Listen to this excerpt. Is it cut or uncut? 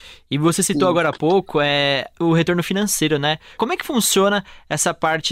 uncut